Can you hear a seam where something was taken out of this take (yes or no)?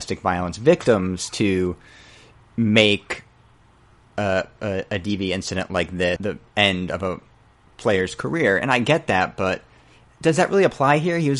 yes